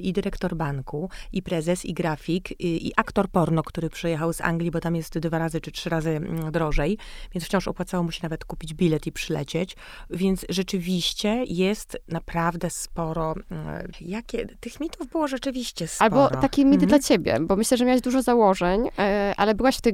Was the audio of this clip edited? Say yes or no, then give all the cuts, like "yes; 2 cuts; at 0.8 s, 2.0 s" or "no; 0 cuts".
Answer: yes; 1 cut; at 13.9 s